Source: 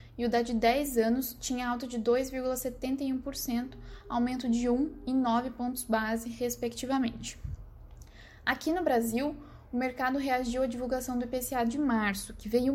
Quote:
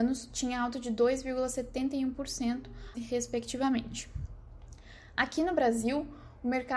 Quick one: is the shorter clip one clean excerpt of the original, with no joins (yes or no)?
no